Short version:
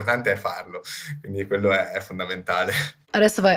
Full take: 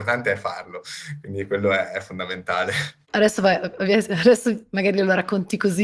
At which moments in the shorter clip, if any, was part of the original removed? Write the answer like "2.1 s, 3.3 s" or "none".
none